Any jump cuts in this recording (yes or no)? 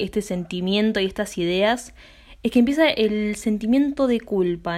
no